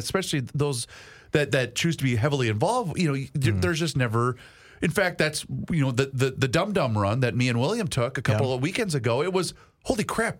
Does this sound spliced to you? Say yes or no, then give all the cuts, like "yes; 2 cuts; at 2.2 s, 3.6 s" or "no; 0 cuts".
no; 0 cuts